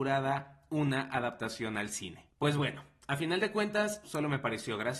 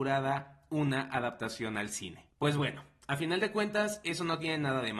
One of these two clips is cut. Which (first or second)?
first